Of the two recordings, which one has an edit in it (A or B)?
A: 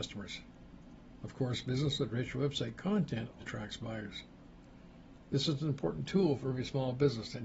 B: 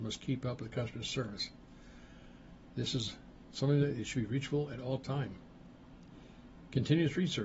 A